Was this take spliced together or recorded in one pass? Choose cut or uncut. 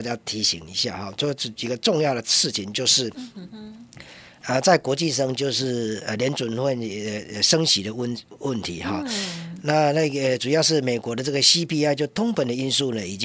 uncut